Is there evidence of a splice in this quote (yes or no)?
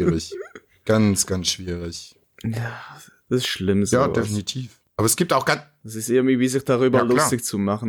no